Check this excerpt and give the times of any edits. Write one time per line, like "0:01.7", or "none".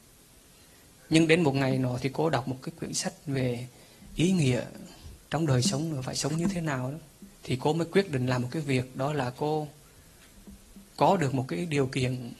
0:05.2
0:07.3